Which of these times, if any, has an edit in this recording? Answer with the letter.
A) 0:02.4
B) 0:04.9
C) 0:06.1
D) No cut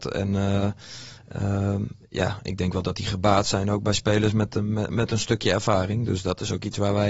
B